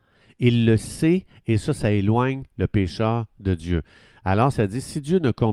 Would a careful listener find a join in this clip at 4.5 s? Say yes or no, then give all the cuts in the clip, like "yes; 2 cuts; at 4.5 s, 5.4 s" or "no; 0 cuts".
yes; 1 cut; at 4.5 s